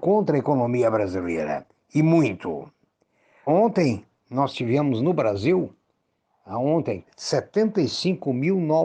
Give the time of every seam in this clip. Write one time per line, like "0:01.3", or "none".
0:03.5
0:07.0